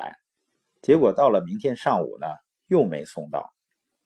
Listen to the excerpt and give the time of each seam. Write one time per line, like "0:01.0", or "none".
none